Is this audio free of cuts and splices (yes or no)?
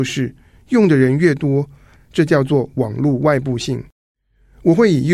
no